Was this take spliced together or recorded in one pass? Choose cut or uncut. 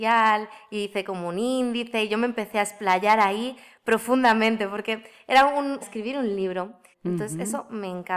cut